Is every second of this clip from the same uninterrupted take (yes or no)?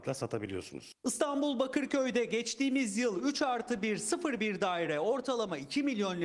yes